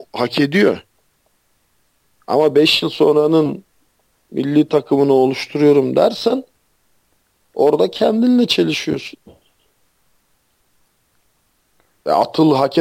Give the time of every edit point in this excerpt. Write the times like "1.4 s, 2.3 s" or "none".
none